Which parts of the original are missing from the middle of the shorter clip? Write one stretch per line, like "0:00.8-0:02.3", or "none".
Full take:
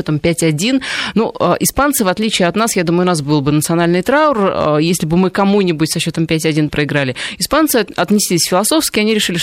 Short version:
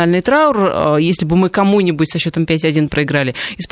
none